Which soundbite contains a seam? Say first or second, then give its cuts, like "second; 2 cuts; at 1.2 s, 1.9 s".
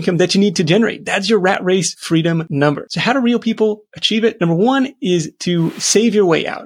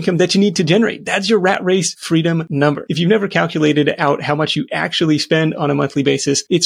second; 1 cut; at 2.9 s